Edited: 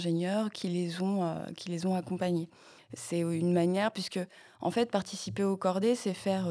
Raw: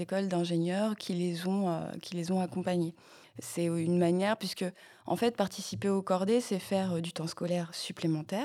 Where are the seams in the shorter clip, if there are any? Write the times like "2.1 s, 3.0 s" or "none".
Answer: none

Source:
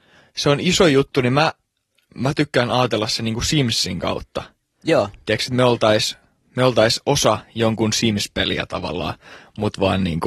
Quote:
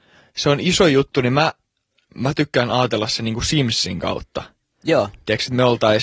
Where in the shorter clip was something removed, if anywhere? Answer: none

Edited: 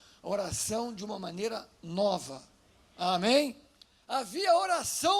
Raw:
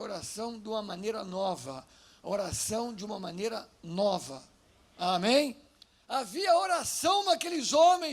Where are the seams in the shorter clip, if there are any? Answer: none

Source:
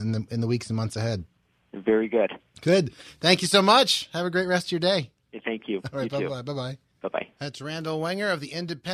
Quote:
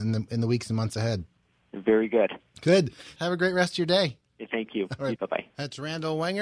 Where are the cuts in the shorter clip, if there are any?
3.2 s, 5.2 s

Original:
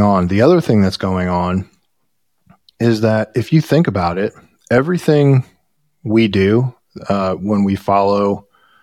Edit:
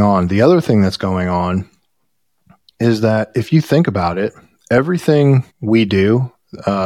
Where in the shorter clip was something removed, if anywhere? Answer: 5.5 s

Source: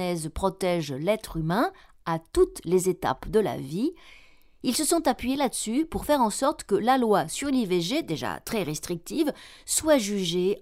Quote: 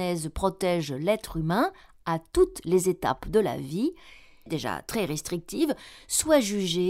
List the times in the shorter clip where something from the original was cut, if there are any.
4.5 s

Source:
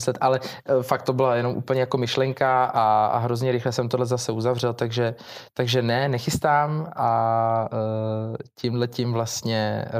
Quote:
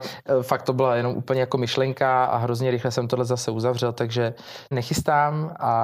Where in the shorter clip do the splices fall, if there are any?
2.3 s, 4.7 s

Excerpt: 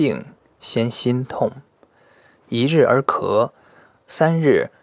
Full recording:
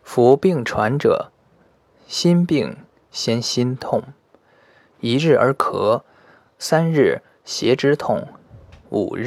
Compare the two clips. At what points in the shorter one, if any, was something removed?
none

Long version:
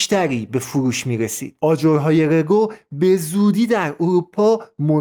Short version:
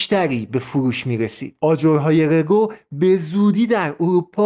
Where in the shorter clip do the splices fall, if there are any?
none

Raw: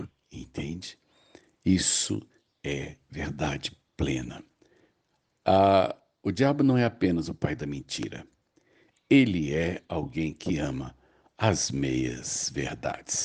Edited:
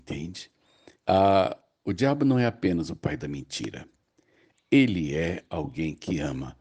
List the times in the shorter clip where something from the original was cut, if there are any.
1.0 s

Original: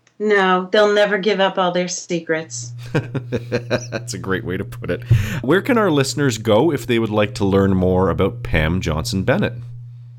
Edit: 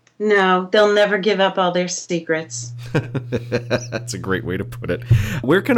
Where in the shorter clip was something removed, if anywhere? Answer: none

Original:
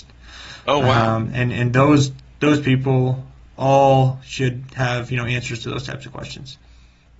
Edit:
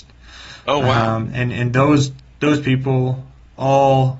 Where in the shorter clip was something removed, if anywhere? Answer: none

